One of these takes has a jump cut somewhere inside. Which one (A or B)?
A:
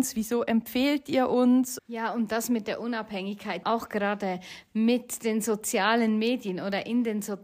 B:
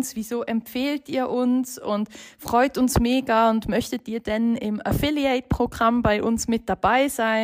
A